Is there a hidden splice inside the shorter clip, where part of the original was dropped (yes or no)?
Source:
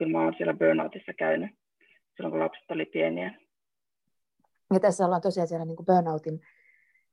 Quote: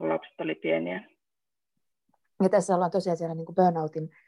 no